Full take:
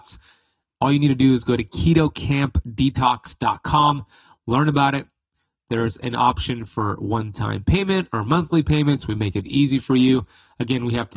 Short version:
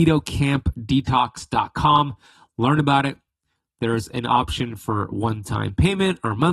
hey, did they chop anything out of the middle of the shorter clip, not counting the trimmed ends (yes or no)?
no